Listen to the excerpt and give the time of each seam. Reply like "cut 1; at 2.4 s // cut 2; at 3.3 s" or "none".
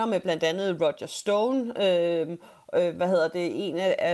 none